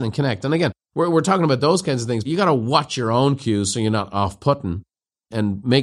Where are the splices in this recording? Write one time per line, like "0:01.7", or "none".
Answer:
0:02.2